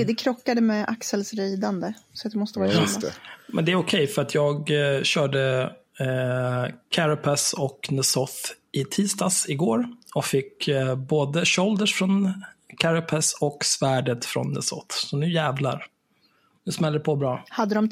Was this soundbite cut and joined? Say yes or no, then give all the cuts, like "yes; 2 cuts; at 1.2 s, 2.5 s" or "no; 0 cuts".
no; 0 cuts